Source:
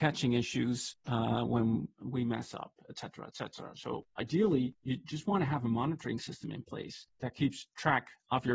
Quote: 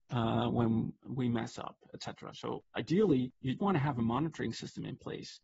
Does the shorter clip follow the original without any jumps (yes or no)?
no